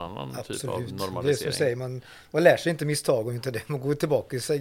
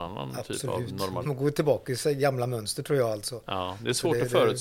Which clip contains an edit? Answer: second; 1 cut; at 1.2 s

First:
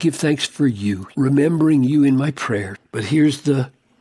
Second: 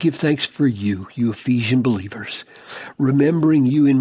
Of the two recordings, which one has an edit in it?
first; 2 cuts; at 1.1 s, 2.7 s

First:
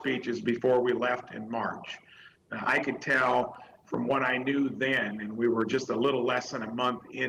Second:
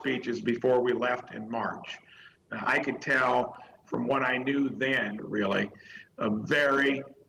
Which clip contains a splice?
second; 1 cut; at 5.2 s

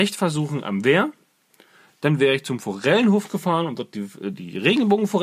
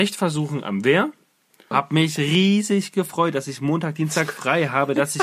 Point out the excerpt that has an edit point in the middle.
second; 1 cut; at 1.7 s

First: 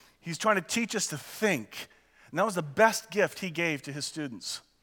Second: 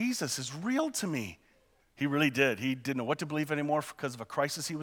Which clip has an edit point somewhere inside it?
second; 1 cut; at 1.8 s

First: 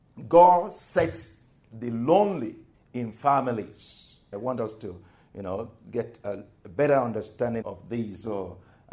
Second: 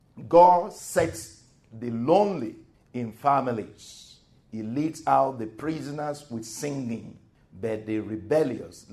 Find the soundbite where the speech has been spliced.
first; 2 cuts; at 4.3 s, 7.6 s

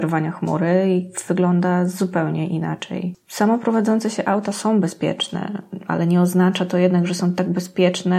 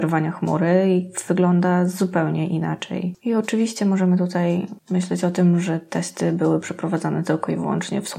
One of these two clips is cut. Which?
second; 1 cut; at 3.2 s

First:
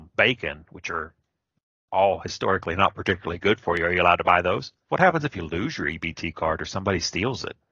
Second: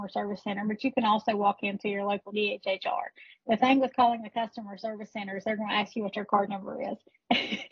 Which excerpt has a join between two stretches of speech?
first; 1 cut; at 4.9 s

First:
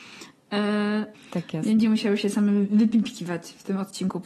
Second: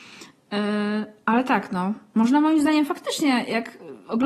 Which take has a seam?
first; 1 cut; at 1.1 s

